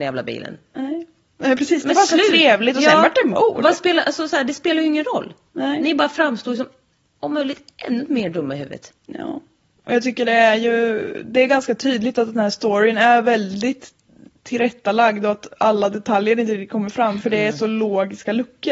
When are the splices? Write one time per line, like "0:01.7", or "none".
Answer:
none